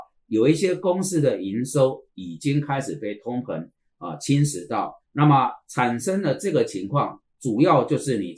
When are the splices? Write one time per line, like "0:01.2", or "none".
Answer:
0:05.0

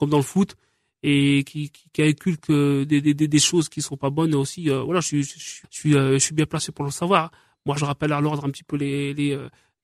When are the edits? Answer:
0:05.6
0:07.8

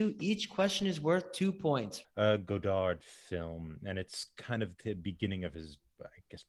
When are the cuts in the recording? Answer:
0:02.0

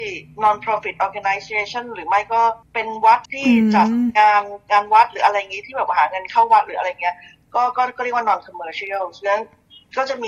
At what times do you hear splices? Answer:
0:03.3

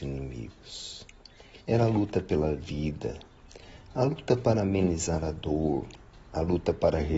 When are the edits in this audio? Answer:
0:01.6

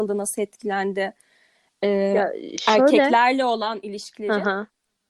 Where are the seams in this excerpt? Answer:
none

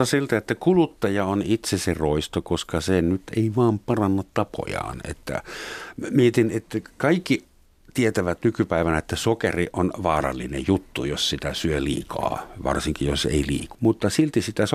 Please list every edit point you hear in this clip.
0:13.8

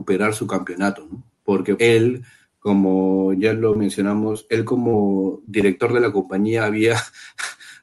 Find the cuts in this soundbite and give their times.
0:01.8

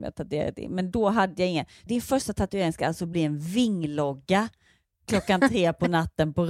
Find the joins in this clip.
0:01.9

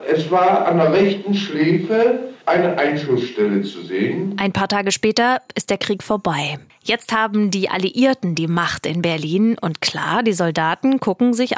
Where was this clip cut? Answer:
0:02.4

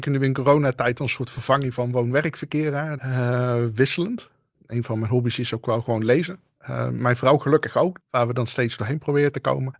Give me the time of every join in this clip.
0:03.0
0:08.0

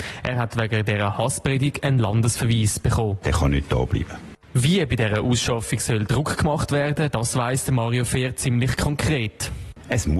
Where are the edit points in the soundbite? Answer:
0:03.2

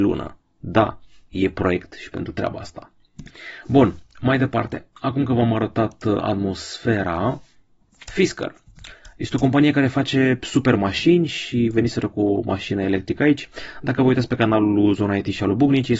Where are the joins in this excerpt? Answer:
none

